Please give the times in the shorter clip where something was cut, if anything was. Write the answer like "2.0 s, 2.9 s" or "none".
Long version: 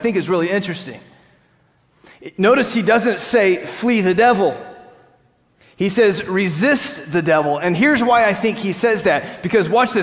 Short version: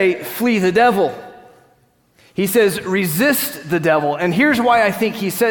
none